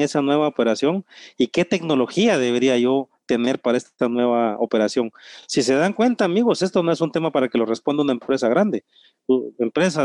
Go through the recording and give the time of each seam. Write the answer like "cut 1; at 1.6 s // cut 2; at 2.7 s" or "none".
none